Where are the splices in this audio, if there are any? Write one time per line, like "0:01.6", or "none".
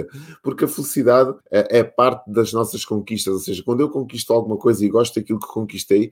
0:01.4

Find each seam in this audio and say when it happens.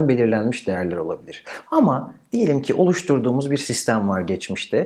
0:01.7

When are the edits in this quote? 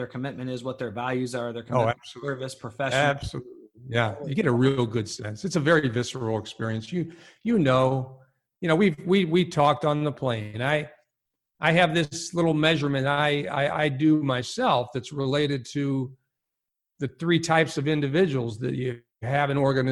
none

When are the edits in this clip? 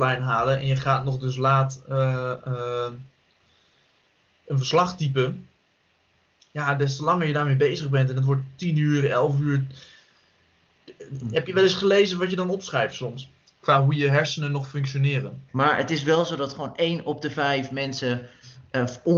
0:13.4
0:15.5

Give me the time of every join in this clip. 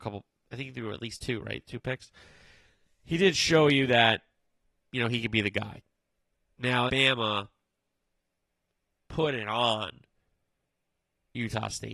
0:06.9

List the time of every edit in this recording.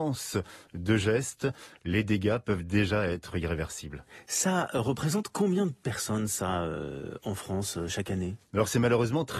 none

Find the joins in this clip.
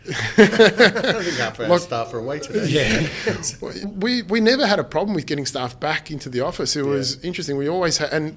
0:03.8

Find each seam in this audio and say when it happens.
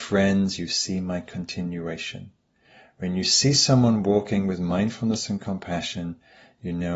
none

